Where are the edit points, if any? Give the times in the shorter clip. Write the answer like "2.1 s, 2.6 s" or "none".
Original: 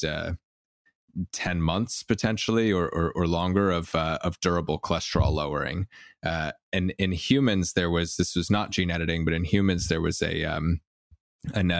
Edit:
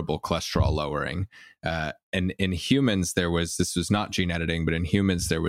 none